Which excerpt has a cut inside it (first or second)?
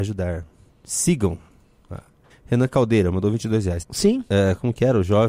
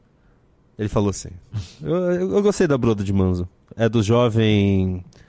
first